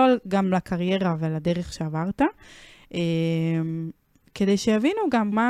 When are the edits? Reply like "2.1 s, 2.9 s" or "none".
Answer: none

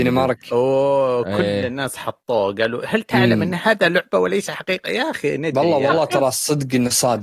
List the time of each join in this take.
none

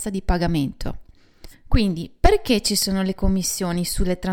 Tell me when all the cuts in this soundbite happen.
1.5 s

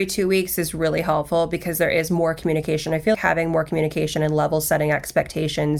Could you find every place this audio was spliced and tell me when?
3.1 s

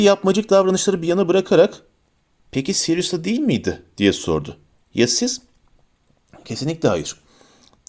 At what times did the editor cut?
none

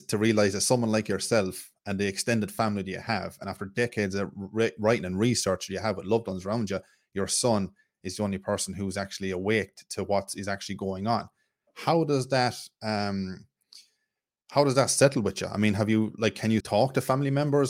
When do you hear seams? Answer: 16.6 s

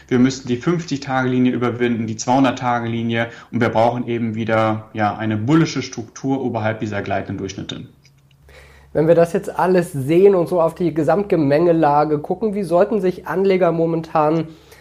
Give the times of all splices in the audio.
none

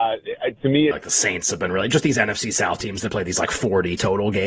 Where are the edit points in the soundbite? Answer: 0.9 s

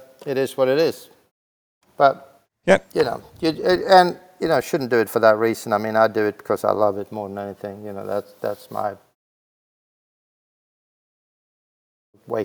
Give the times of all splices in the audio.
none

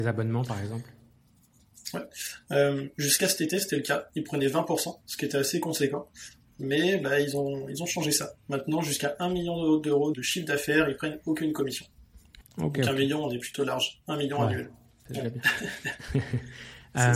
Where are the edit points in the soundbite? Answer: 10.1 s, 12.4 s, 15.1 s

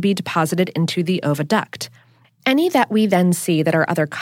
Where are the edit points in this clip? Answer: 2.2 s

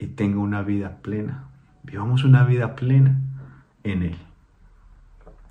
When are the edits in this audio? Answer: none

